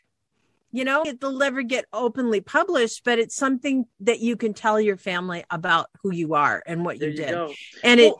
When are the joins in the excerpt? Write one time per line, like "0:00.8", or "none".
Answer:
0:01.0